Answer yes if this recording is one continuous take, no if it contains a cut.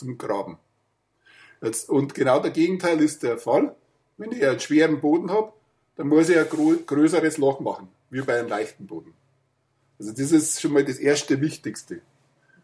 yes